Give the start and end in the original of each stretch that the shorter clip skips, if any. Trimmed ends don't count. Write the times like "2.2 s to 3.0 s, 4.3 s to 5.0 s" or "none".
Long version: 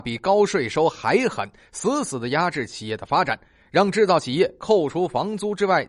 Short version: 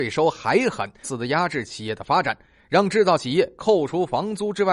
1.6 s to 2.1 s